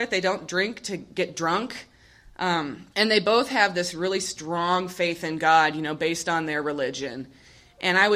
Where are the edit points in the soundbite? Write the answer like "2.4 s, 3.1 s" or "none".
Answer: 2.9 s